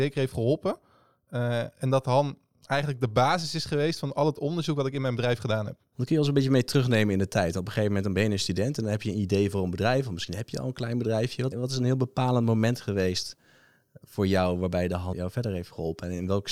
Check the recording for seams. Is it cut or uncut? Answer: cut